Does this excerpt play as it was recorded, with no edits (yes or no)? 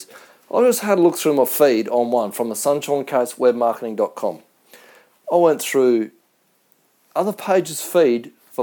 yes